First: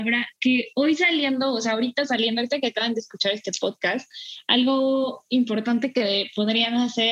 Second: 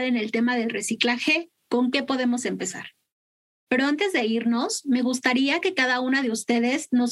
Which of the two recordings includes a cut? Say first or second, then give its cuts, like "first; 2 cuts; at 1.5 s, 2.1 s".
second; 1 cut; at 3.7 s